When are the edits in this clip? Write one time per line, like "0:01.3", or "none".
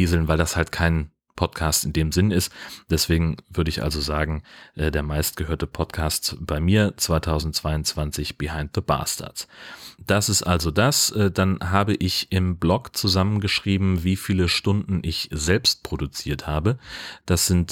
none